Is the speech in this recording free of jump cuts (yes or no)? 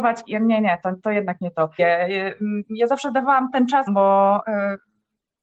no